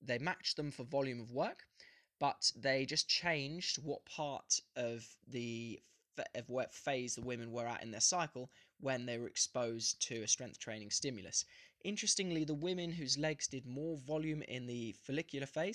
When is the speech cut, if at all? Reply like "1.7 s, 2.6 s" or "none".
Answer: none

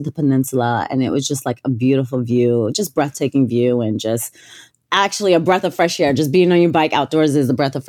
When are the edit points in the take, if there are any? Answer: none

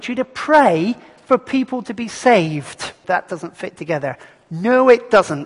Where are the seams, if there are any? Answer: 3.0 s

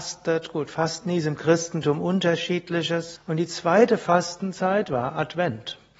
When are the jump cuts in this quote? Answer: 3.2 s

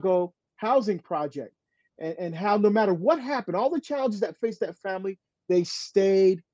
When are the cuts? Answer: none

